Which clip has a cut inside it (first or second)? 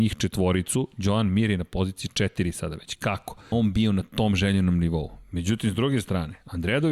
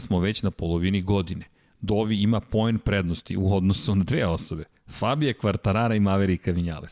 first